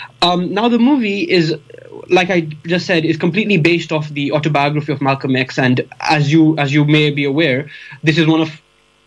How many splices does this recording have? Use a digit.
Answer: 0